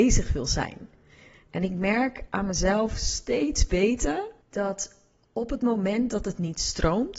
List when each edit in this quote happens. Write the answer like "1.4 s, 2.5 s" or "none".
4.4 s